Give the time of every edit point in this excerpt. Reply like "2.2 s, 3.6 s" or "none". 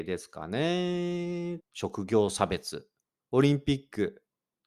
1.6 s, 3.2 s